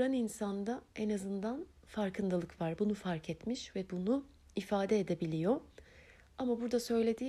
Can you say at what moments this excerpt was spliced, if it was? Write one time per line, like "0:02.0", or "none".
none